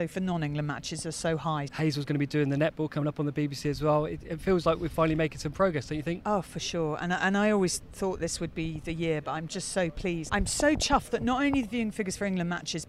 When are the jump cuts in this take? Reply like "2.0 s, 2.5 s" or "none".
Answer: 1.7 s, 10.3 s